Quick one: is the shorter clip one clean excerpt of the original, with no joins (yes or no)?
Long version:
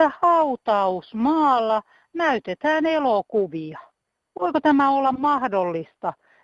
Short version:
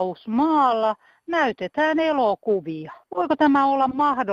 no